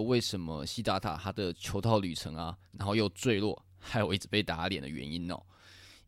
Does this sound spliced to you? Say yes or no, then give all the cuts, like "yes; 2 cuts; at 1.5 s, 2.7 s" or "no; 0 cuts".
yes; 1 cut; at 2.7 s